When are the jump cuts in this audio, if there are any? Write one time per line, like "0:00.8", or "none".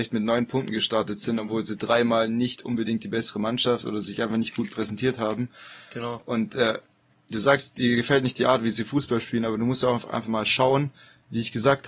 none